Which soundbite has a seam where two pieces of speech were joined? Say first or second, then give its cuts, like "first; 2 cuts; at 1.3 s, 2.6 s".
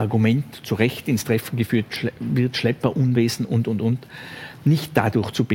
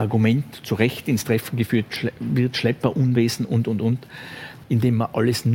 second; 1 cut; at 4.6 s